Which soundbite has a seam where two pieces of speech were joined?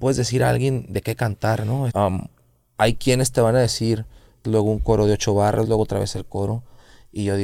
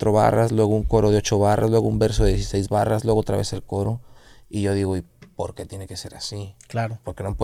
first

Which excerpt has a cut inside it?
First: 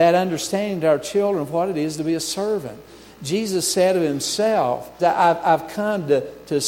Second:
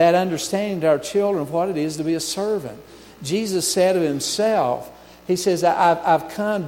first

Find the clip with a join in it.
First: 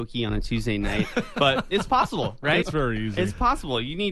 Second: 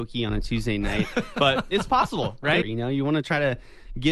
second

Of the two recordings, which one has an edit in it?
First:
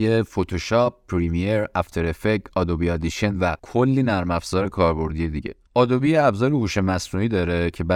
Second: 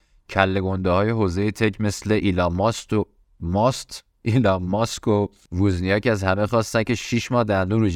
first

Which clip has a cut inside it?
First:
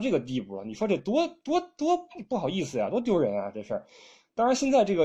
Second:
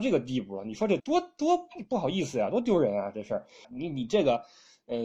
second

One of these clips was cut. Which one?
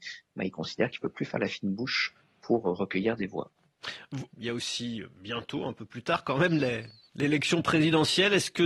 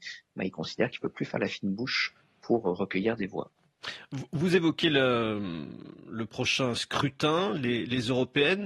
first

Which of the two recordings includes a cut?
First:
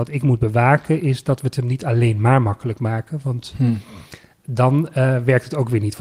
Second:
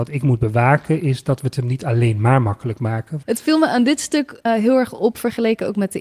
second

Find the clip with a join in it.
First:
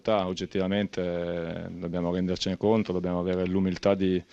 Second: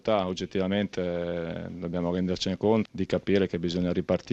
second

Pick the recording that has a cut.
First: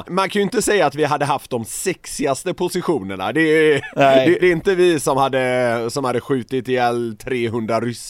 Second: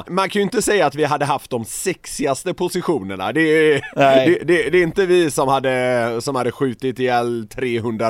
first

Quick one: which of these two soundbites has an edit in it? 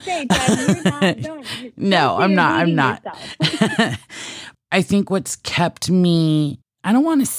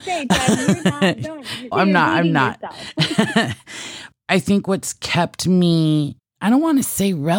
second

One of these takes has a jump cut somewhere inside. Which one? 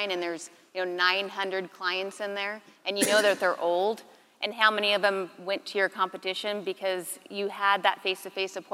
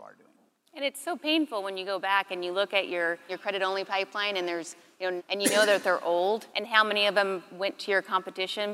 second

